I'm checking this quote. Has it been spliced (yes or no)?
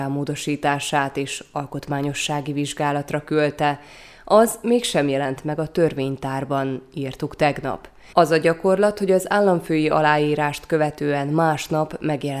yes